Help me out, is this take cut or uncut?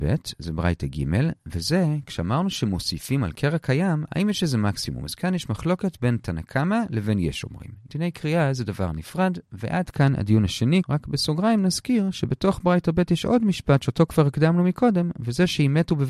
cut